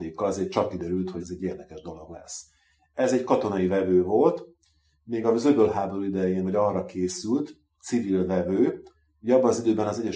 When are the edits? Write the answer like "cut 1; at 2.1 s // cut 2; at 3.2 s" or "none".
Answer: cut 1; at 1.2 s